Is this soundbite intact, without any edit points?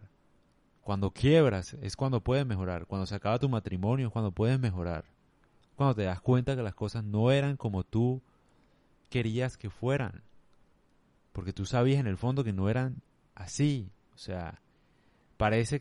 yes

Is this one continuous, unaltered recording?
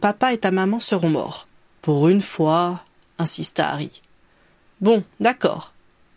no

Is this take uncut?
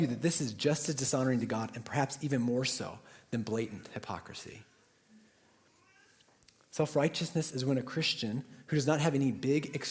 yes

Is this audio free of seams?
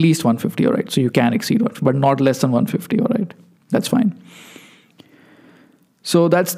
yes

